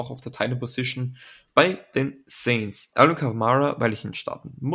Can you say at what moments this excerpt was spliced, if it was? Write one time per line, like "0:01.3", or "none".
0:01.5
0:02.9